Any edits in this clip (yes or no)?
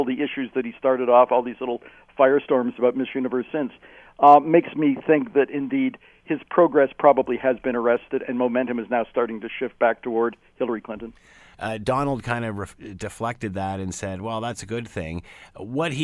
yes